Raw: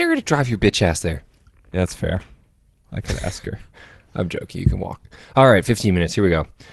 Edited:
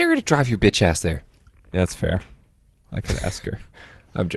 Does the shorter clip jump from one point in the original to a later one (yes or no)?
no